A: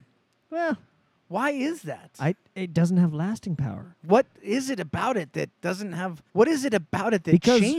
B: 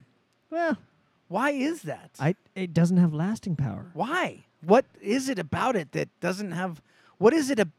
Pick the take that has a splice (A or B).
A